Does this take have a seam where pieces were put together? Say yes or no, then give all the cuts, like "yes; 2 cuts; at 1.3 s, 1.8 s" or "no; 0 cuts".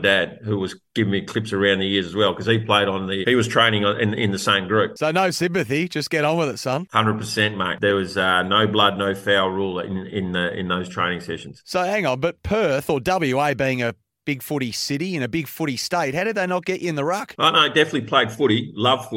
yes; 1 cut; at 3.2 s